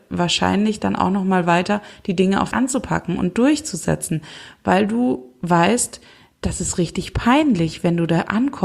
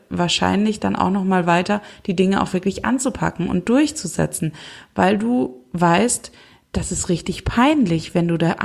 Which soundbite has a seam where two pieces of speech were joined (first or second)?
first